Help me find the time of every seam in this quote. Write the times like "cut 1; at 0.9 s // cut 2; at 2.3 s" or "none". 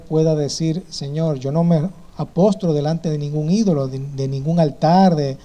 cut 1; at 1.4 s